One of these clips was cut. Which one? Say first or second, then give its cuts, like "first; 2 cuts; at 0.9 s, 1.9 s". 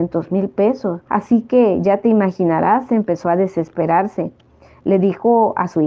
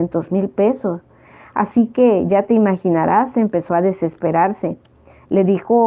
first; 1 cut; at 1.1 s